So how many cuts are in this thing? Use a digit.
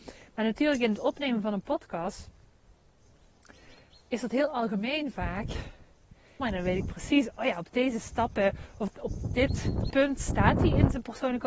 3